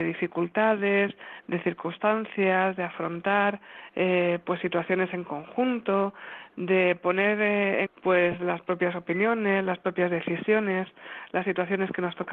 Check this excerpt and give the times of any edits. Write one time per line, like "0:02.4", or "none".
0:07.9